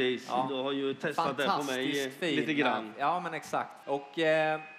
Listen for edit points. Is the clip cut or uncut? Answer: cut